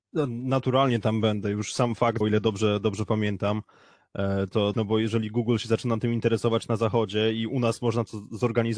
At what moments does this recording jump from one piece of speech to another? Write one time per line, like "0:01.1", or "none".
0:02.2
0:04.7